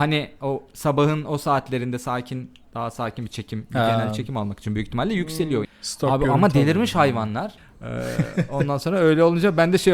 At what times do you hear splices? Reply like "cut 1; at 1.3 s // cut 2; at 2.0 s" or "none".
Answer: cut 1; at 5.6 s // cut 2; at 7.6 s